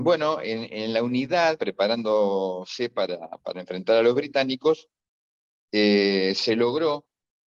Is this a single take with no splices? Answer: no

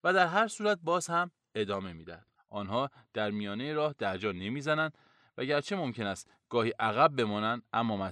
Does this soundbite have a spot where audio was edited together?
yes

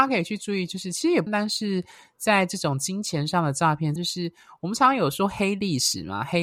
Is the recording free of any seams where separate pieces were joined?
no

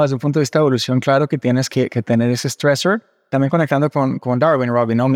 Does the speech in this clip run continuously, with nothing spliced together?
yes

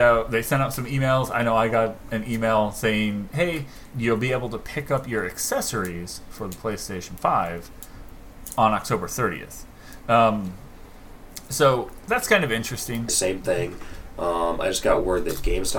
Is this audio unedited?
no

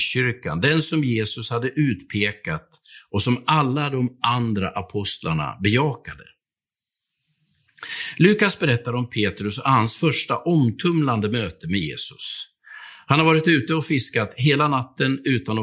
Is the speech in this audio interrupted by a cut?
no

